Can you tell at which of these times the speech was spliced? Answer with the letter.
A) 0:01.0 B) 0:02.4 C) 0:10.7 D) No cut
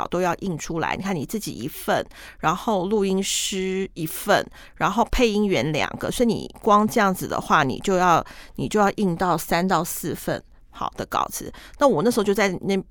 D